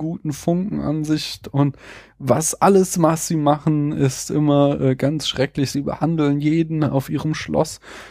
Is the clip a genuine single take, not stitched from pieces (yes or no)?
yes